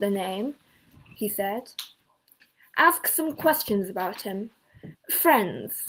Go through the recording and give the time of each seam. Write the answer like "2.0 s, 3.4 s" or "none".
4.9 s